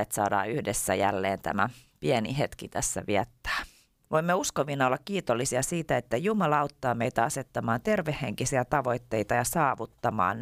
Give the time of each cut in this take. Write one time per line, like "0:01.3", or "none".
0:04.0

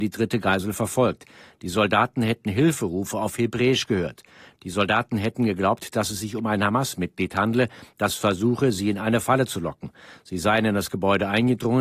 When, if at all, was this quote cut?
none

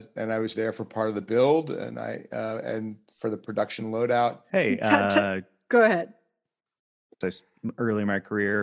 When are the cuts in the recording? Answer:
0:04.5
0:07.2

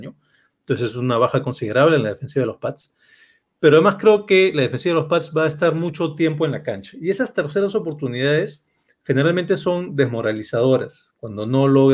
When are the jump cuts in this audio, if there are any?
none

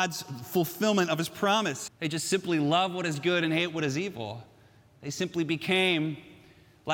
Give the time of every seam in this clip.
0:01.9

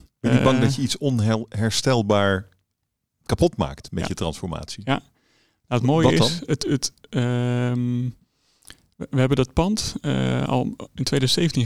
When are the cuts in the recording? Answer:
none

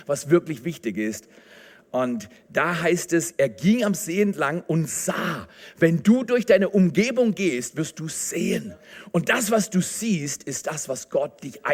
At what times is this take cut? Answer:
none

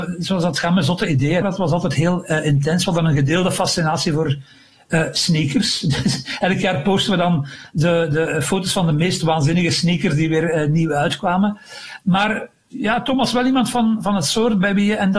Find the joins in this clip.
0:01.4

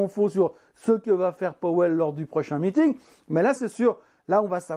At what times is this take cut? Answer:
0:03.6

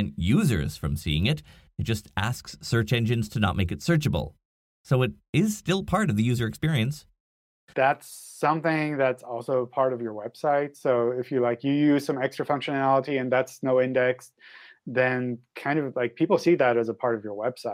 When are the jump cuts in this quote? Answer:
0:07.7

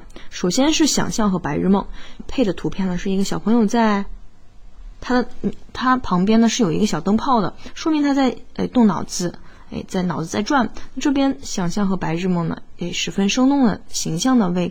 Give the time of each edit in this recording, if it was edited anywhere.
0:02.2

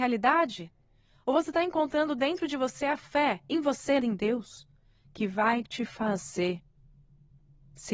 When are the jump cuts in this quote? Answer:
0:04.0

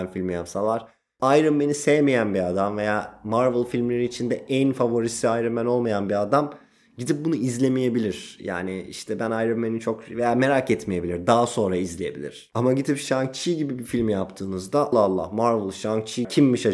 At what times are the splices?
0:14.9

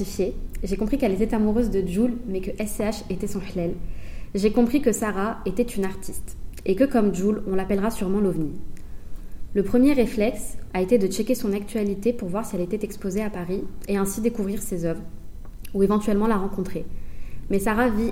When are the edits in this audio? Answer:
0:10.7

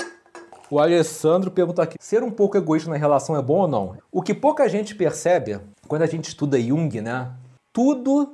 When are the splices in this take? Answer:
0:01.9
0:04.0

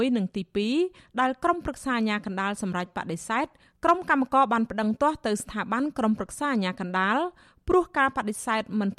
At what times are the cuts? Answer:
none

